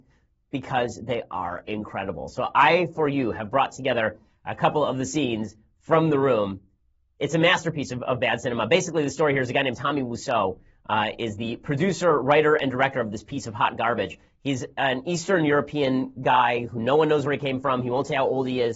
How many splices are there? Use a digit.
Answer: 0